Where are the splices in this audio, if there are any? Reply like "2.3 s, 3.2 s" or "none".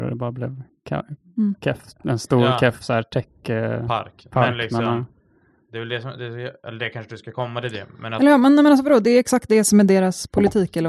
none